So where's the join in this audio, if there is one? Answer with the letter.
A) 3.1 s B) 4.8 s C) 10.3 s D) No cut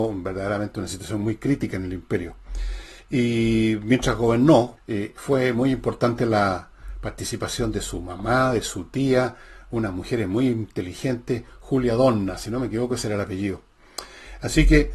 B